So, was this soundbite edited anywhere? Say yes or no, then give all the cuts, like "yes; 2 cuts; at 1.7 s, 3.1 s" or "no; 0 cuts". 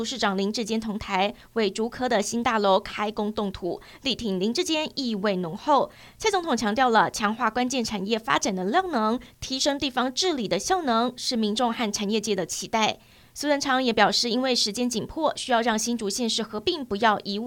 no; 0 cuts